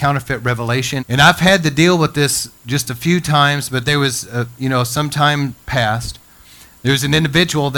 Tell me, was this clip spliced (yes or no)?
yes